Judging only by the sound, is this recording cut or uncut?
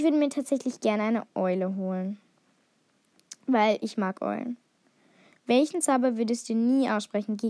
uncut